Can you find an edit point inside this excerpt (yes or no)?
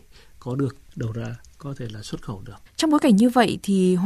yes